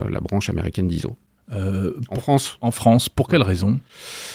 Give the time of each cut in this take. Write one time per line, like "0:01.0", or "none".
0:01.4